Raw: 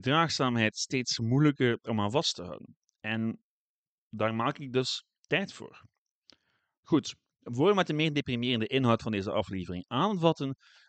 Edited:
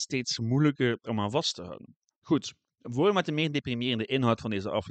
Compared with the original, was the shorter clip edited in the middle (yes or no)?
yes